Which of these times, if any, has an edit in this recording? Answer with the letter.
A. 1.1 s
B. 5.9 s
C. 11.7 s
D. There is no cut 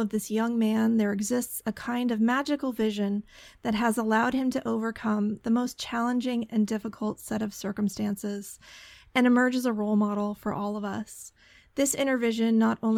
D